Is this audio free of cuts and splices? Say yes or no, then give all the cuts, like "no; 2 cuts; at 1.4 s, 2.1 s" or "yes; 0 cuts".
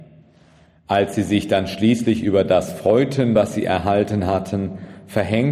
yes; 0 cuts